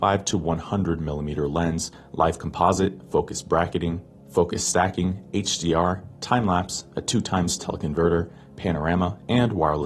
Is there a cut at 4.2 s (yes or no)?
no